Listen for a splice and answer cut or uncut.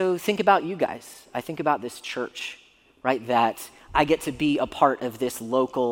uncut